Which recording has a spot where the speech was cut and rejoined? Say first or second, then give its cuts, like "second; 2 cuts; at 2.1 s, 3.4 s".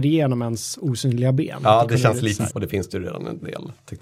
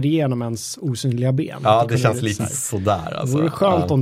first; 1 cut; at 2.5 s